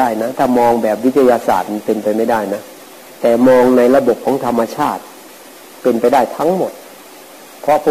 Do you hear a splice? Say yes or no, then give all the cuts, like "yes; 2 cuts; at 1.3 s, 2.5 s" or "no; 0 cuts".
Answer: no; 0 cuts